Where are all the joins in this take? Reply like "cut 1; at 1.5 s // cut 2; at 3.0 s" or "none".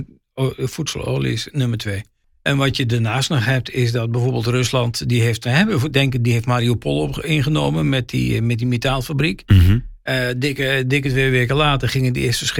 none